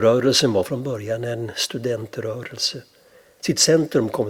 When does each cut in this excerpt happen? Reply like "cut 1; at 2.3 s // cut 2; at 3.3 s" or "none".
cut 1; at 3.4 s

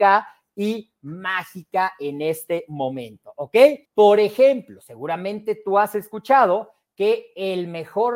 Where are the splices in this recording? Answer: cut 1; at 3.9 s

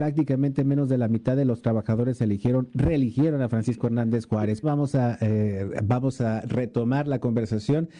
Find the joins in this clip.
cut 1; at 4.6 s

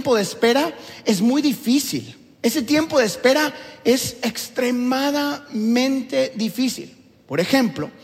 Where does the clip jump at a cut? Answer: none

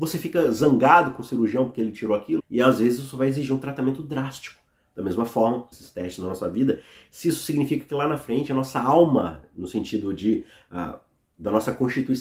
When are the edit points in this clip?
cut 1; at 2.4 s // cut 2; at 5.7 s

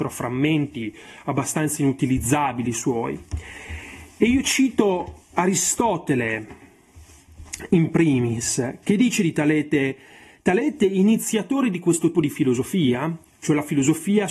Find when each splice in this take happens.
cut 1; at 12.1 s

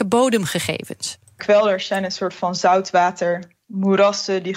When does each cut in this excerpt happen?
cut 1; at 1.2 s

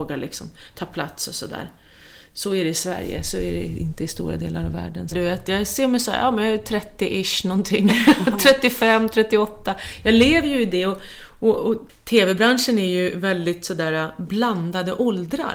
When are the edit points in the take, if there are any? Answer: cut 1; at 5.1 s

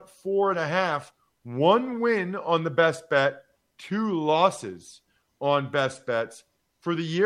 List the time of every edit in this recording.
none

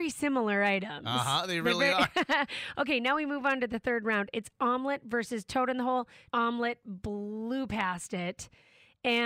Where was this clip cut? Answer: cut 1; at 6.3 s

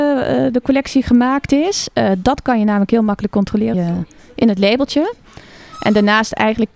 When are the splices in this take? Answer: cut 1; at 3.7 s

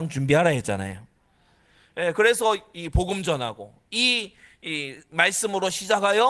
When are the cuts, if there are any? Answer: none

